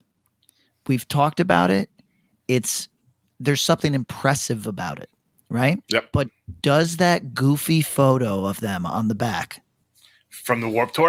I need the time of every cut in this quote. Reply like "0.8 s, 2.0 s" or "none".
5.8 s